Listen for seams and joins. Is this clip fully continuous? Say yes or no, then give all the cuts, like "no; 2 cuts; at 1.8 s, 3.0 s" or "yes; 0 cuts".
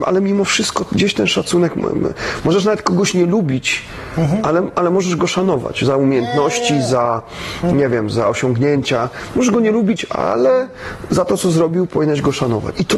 yes; 0 cuts